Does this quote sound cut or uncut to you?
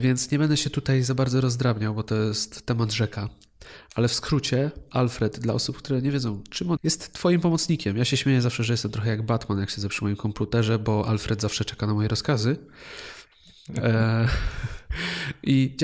cut